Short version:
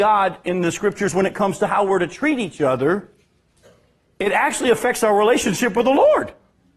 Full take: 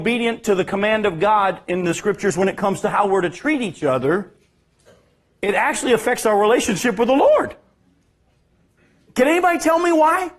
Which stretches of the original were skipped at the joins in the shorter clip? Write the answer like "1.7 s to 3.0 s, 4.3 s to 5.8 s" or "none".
none